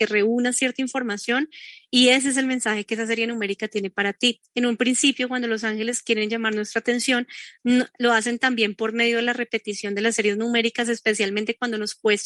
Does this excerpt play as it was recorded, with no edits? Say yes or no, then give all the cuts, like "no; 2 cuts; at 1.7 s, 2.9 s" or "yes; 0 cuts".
yes; 0 cuts